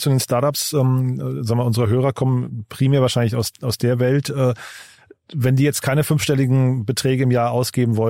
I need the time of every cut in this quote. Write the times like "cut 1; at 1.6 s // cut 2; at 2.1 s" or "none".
none